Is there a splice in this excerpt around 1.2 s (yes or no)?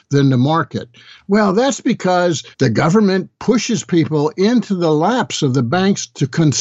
no